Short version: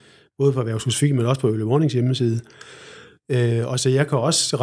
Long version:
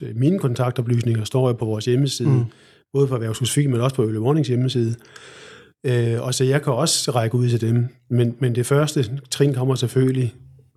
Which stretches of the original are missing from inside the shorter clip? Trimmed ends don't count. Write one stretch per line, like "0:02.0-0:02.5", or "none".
none